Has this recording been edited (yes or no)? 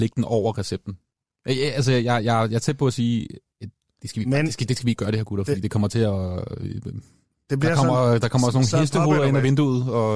no